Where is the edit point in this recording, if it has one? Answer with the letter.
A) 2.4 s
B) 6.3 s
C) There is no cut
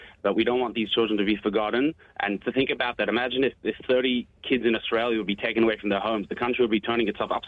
A